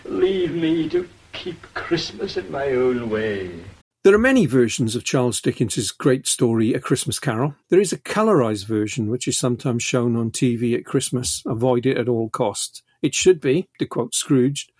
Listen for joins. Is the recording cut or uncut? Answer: cut